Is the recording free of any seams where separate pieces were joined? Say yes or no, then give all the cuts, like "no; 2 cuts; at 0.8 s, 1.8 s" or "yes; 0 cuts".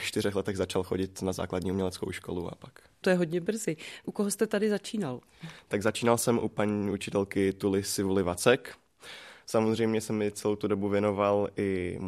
yes; 0 cuts